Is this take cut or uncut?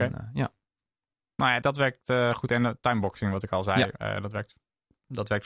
cut